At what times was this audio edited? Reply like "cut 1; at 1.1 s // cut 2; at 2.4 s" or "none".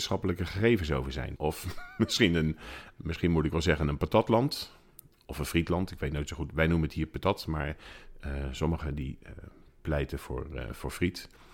cut 1; at 1.4 s